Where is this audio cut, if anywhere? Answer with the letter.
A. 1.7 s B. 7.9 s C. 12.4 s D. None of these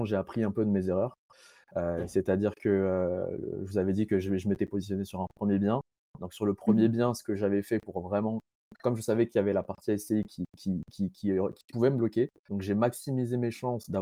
C